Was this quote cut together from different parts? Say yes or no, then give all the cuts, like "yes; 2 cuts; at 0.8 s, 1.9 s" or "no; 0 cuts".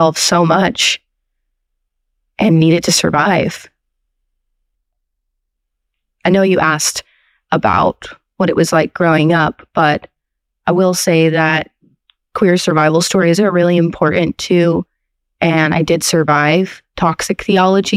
no; 0 cuts